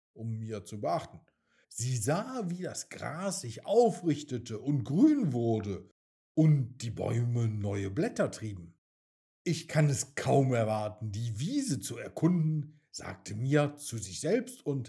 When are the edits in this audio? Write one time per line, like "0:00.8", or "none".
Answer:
0:01.6